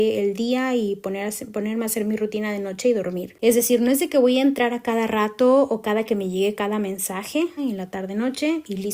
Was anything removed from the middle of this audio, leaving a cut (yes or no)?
yes